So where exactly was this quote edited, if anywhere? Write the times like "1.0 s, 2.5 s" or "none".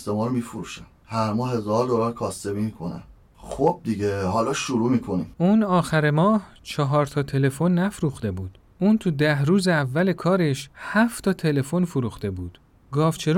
3.3 s, 5.3 s